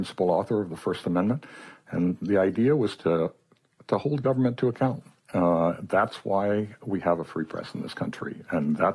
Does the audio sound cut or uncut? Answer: uncut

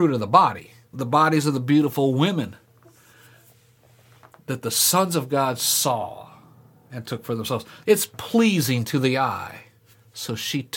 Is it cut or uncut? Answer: cut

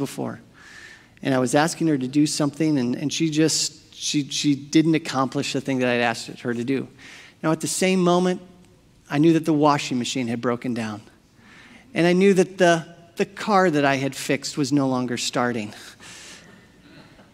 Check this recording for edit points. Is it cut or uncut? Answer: uncut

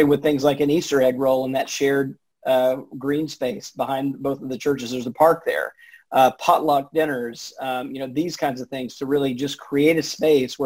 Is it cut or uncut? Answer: uncut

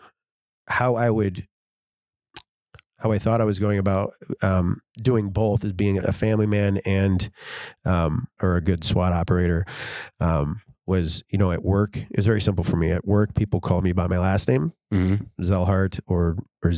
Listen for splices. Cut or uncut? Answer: cut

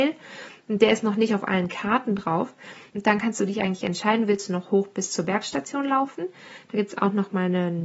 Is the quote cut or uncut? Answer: cut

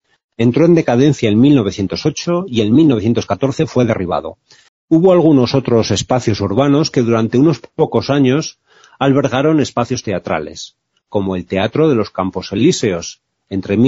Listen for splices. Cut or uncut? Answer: cut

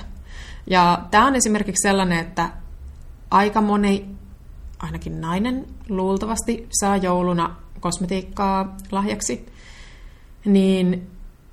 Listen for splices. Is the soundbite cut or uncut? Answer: uncut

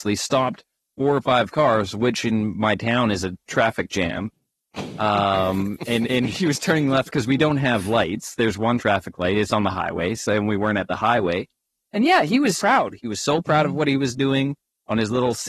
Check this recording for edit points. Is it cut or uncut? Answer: cut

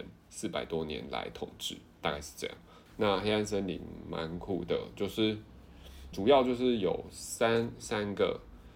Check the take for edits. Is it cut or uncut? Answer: cut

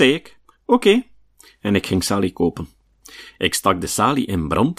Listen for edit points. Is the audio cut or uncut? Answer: cut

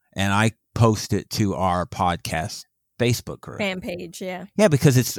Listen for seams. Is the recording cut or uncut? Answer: uncut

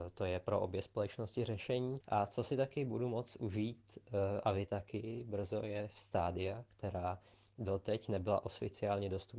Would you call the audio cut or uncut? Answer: cut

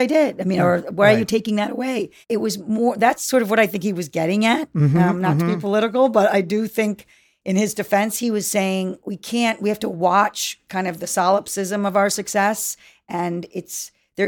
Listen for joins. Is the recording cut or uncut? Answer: cut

